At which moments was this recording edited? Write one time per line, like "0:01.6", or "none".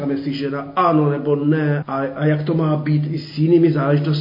0:01.8